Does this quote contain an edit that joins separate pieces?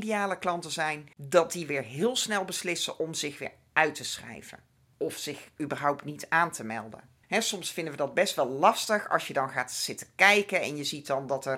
yes; 1 cut; at 1.1 s

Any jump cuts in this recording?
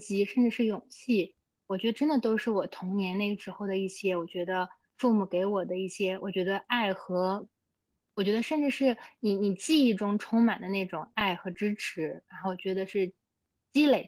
no; 0 cuts

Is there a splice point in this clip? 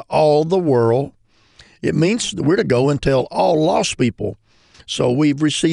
yes; 1 cut; at 4.7 s

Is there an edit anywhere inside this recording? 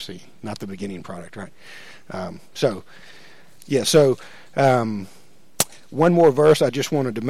yes; 1 cut; at 3.6 s

